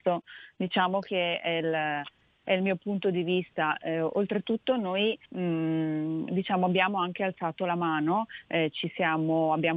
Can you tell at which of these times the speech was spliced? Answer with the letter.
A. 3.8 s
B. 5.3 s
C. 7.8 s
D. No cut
B